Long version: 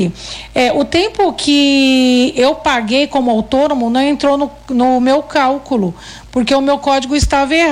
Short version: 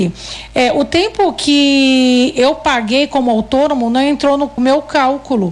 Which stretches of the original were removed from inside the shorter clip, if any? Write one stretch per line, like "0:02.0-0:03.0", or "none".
0:04.6-0:05.0